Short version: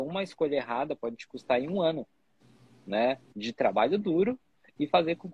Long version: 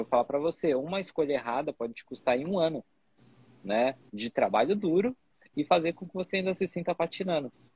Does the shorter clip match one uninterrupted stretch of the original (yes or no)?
yes